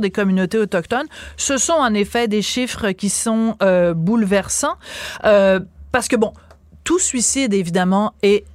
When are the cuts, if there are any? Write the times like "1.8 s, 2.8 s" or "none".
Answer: none